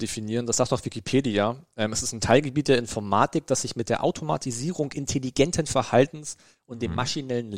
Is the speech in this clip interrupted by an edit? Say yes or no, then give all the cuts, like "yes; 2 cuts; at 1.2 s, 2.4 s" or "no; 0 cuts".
no; 0 cuts